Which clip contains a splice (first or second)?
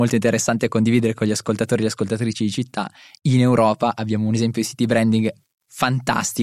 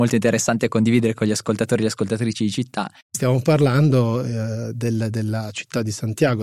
second